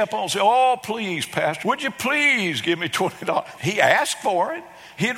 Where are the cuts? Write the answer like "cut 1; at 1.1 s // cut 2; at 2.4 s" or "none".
cut 1; at 1.6 s // cut 2; at 3.6 s